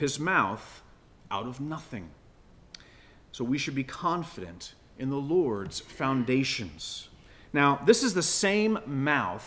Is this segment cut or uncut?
uncut